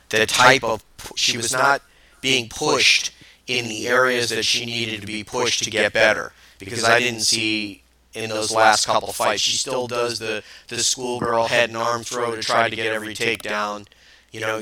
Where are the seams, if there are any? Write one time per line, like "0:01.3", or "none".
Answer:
none